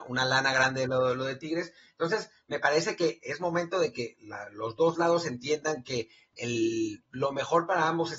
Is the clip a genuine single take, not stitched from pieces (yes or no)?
yes